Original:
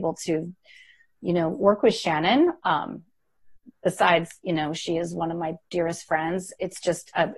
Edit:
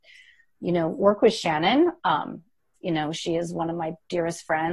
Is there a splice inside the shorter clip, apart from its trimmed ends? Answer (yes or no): yes